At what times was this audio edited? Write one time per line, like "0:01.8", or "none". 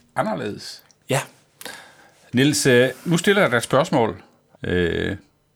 0:04.5